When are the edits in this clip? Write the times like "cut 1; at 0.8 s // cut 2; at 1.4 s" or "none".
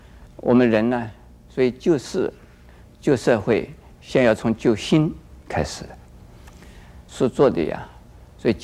cut 1; at 7.1 s